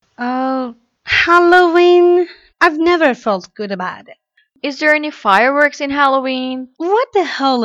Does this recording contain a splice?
yes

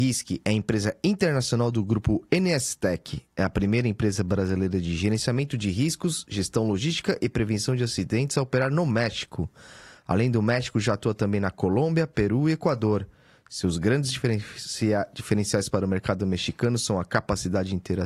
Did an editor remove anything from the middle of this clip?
no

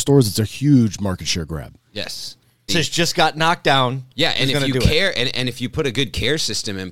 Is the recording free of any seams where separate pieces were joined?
no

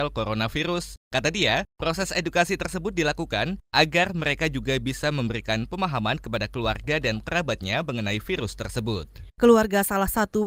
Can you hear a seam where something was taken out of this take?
no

